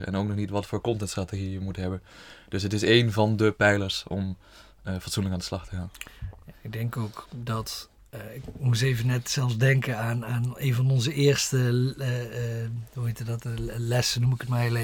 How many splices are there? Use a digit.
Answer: 0